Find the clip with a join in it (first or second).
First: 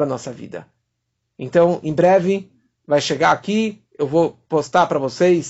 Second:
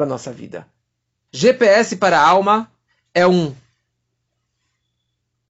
second